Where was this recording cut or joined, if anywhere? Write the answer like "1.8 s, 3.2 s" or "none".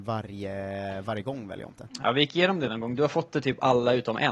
none